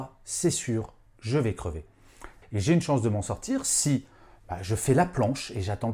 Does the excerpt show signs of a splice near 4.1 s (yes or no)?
no